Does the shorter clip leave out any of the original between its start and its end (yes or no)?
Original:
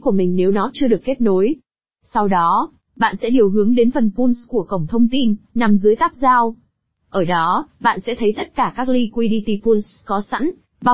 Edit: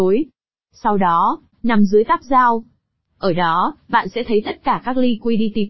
yes